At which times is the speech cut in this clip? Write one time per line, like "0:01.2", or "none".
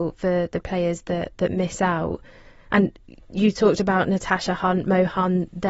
none